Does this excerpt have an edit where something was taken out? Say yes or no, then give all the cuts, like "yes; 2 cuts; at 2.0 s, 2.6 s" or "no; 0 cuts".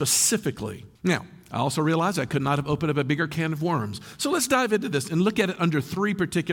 yes; 1 cut; at 1.0 s